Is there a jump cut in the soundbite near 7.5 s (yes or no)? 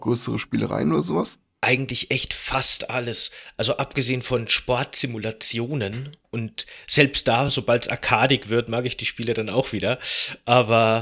no